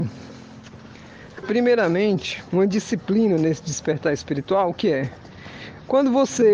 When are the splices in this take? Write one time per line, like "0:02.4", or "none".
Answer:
0:01.4